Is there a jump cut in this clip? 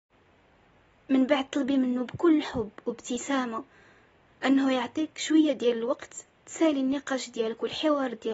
no; 0 cuts

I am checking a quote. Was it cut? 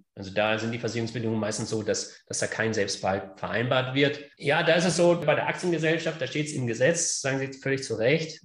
yes; 1 cut; at 4.3 s

